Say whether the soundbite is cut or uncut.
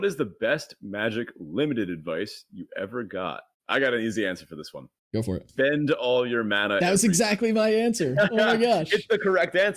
uncut